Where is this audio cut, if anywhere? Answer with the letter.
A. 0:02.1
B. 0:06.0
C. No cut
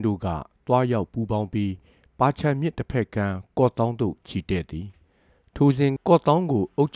B